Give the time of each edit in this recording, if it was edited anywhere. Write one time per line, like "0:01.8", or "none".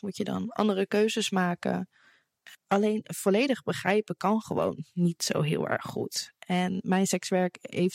0:02.5